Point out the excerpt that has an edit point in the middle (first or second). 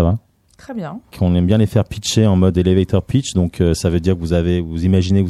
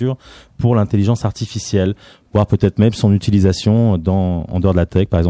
first